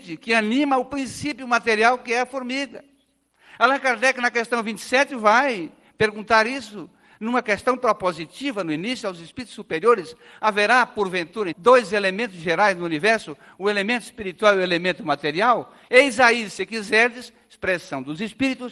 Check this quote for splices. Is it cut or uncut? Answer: cut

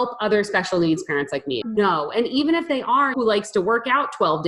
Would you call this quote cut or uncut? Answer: cut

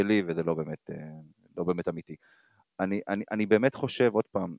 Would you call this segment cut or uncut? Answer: uncut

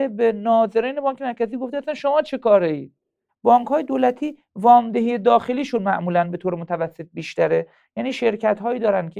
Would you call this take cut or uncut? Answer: cut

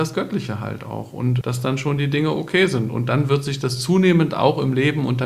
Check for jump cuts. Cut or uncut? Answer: cut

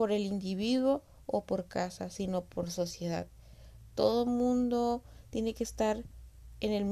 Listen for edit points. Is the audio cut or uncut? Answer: uncut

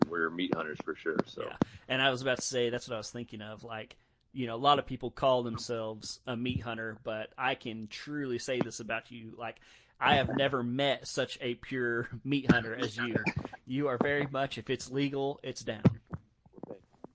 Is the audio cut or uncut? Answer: uncut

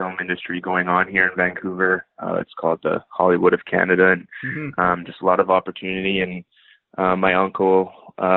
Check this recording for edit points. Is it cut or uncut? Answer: uncut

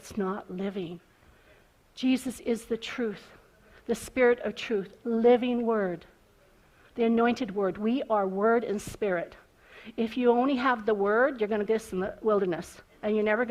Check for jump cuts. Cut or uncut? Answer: cut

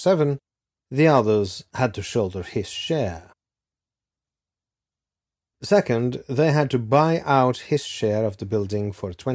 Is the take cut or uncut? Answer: uncut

